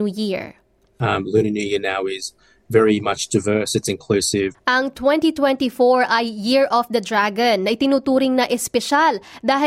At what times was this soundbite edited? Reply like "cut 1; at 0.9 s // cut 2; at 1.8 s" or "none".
cut 1; at 4.5 s